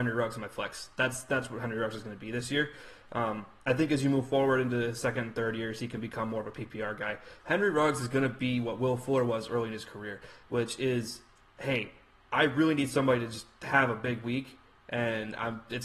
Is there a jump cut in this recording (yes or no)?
yes